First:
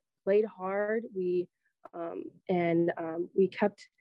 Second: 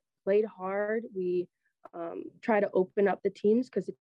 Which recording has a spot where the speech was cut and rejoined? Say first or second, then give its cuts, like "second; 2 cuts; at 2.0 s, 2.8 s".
first; 1 cut; at 2.4 s